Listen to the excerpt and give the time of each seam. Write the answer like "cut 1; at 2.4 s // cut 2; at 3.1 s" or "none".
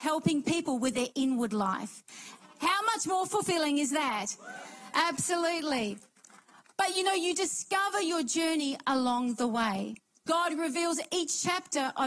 cut 1; at 10.3 s